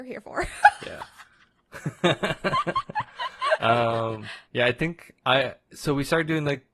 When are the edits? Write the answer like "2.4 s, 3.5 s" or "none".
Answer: 1.7 s, 4.5 s